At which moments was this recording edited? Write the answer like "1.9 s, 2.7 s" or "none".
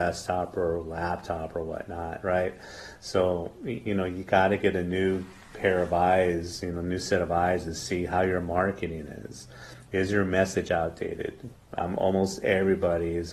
11.5 s